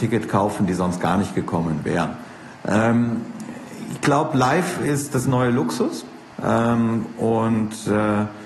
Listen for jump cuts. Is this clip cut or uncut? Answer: cut